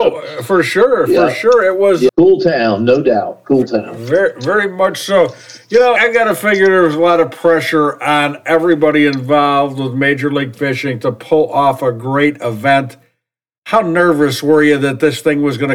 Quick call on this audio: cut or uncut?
cut